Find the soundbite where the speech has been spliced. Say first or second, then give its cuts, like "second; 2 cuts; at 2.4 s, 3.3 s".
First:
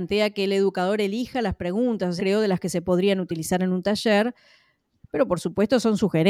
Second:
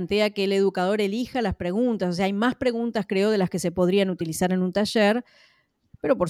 first; 1 cut; at 2.2 s